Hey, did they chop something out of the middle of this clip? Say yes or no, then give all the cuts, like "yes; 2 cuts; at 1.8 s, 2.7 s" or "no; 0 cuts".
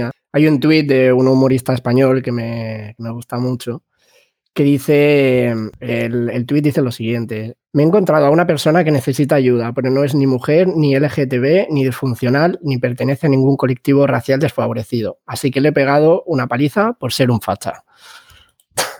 no; 0 cuts